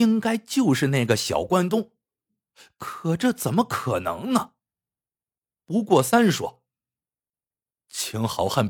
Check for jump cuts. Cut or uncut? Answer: uncut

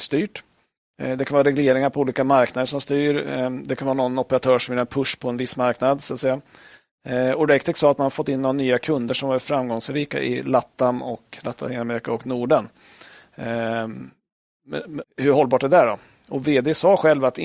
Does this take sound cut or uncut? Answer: cut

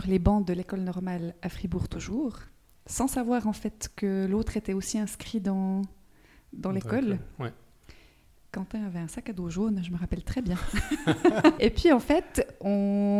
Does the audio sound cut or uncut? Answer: cut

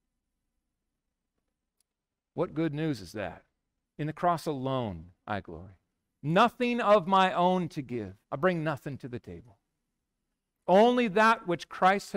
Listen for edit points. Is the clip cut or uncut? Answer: cut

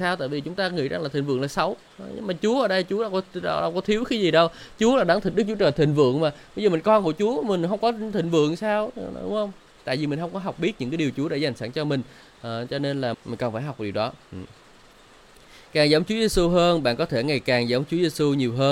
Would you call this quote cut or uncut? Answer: cut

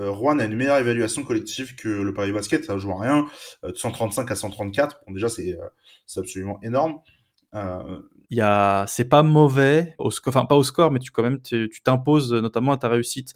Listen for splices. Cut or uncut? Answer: cut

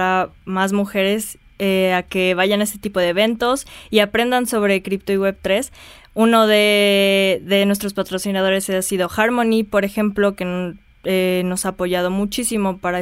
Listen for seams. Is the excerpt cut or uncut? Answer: uncut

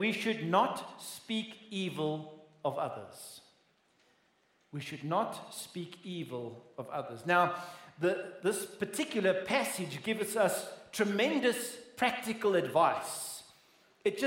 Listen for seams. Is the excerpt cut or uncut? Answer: uncut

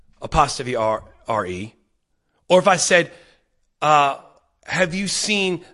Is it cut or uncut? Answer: uncut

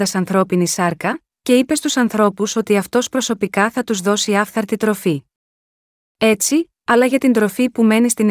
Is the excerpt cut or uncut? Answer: cut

